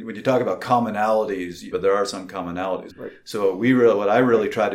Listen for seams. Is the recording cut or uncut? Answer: cut